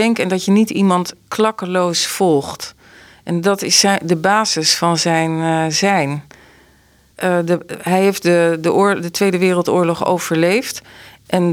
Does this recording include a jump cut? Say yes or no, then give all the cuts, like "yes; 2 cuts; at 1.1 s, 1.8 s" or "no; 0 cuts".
yes; 1 cut; at 7.1 s